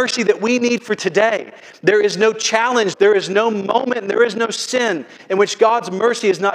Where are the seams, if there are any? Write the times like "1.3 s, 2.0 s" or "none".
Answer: 2.9 s

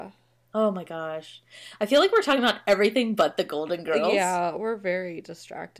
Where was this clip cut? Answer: none

